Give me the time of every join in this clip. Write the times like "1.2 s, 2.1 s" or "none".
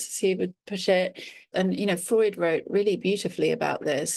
1.5 s